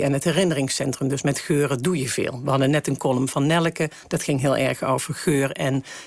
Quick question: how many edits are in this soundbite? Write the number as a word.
zero